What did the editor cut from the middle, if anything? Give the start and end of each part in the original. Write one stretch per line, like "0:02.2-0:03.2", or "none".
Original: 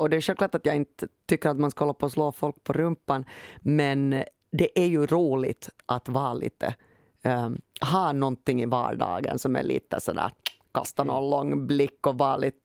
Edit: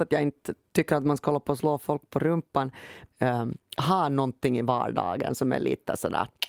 0:03.6-0:07.1